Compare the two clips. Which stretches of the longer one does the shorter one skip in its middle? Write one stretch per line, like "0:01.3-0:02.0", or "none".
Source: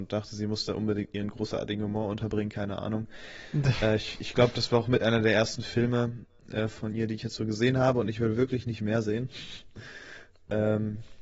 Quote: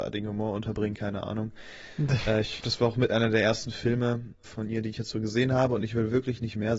0:04.2-0:04.5
0:06.4-0:06.7

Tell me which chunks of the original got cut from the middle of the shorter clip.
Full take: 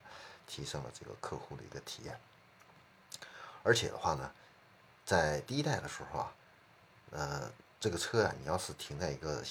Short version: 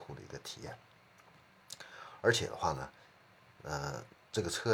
0:04.9-0:07.0

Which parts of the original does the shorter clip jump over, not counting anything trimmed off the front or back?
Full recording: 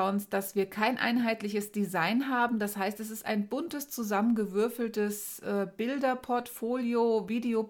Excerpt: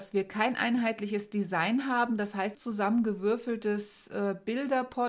0:03.0-0:03.9

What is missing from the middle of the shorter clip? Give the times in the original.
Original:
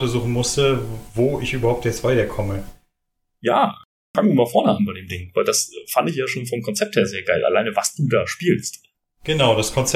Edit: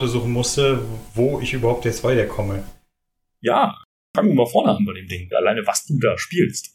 0:05.3-0:07.4

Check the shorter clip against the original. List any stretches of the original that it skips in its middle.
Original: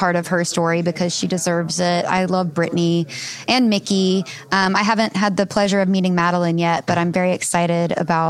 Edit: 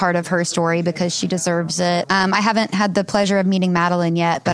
0:02.0-0:04.5

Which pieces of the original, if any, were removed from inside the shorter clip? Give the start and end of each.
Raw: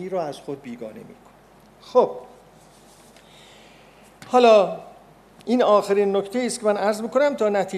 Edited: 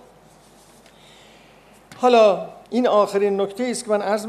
0:05.0-0:05.4

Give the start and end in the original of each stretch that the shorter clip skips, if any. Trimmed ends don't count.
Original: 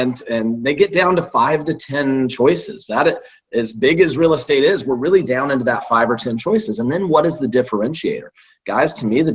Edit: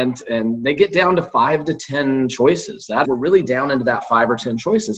0:03.0-0:04.8

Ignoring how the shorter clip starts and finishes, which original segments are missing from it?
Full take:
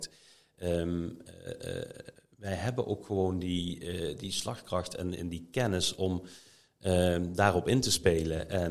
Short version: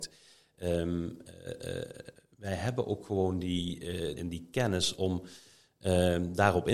0:04.2-0:05.2

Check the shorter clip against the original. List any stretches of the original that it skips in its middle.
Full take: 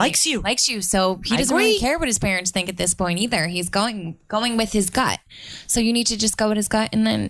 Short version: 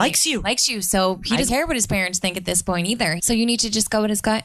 0:01.5-0:01.8
0:03.5-0:05.7

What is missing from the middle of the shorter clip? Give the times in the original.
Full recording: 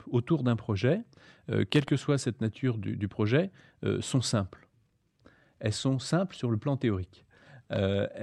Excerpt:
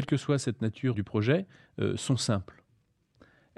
0:02.7-0:03.0

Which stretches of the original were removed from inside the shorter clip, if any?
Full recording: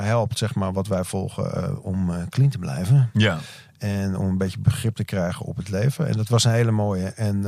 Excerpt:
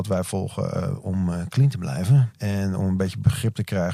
0:03.1-0:03.7

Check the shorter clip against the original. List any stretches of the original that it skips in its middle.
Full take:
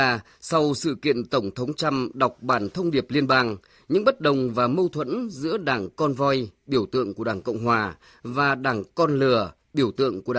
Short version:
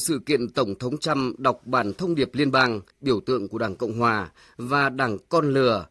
0:03.7-0:06.6

